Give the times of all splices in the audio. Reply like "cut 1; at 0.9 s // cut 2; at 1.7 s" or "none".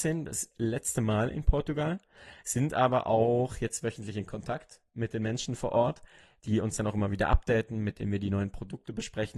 none